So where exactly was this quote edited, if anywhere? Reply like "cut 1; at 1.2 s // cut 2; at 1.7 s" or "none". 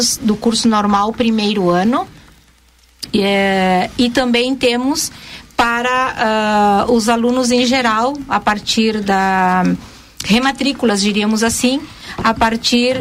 none